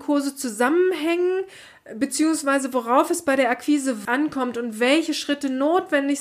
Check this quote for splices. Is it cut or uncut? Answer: cut